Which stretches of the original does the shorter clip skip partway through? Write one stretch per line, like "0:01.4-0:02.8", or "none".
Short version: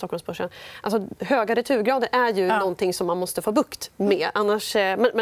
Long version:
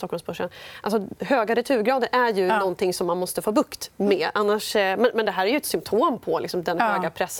none